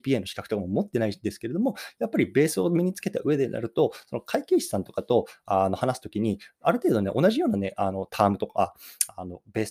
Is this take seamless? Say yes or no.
no